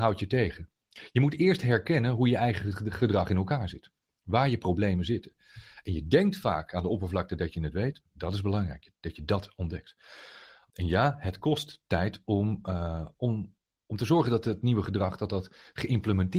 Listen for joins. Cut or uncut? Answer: cut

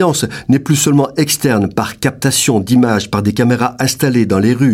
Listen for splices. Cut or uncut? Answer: uncut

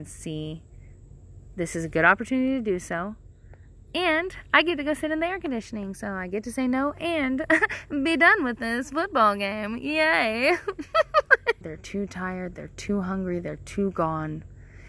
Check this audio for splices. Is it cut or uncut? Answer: cut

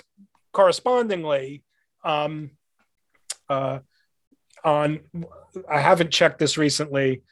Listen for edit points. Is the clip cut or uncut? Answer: cut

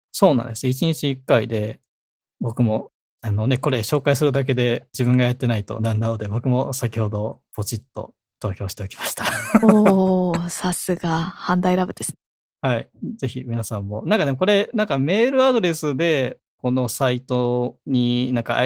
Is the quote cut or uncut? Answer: uncut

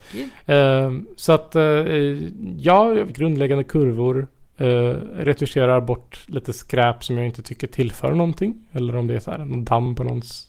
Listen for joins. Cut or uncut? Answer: cut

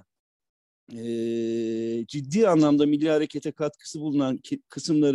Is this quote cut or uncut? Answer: uncut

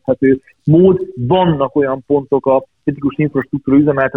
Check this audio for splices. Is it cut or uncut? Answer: uncut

